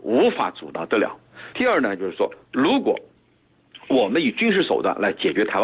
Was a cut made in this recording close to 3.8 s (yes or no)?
no